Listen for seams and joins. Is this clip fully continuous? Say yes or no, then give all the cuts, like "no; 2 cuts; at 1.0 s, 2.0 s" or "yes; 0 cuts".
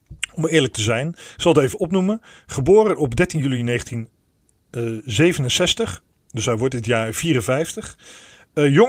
yes; 0 cuts